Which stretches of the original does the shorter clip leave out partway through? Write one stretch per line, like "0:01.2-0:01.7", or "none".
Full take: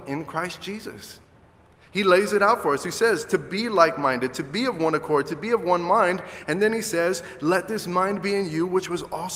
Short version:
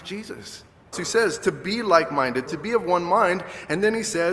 0:01.5-0:02.8
0:04.3-0:05.2